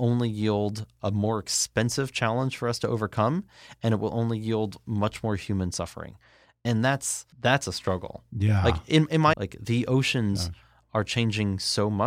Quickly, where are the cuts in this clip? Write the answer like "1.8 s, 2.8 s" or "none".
7.3 s, 9.3 s